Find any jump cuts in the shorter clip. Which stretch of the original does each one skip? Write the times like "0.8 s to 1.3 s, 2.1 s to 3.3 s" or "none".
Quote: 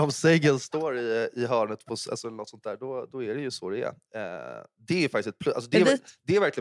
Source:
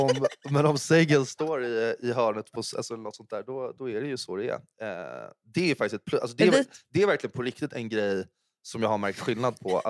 none